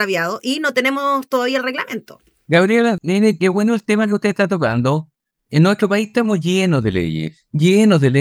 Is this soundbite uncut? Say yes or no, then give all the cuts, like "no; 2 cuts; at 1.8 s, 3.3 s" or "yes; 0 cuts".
no; 1 cut; at 3.0 s